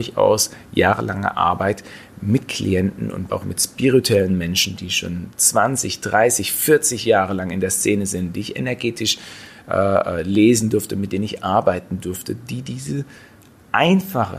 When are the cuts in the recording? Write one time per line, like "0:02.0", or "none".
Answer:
0:03.3